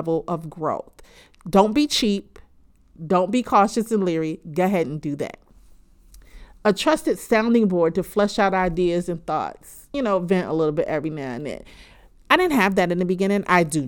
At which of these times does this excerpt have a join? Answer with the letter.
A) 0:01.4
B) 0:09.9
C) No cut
B